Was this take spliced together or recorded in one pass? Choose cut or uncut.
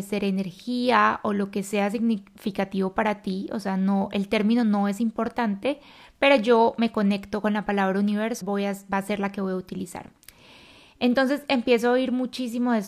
cut